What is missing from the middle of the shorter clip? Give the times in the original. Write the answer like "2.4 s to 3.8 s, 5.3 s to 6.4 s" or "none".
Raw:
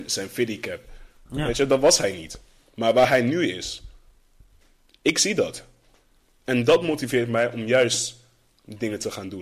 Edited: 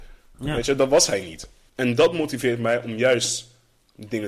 2.6 s to 6.4 s